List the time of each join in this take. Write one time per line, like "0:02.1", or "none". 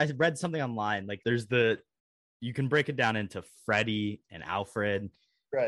0:01.2